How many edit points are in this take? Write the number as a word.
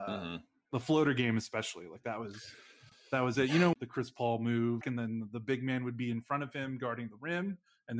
two